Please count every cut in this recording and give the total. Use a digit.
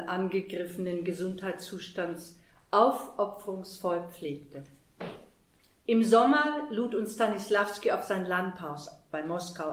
0